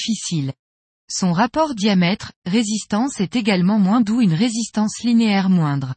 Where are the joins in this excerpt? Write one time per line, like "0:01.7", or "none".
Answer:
0:04.0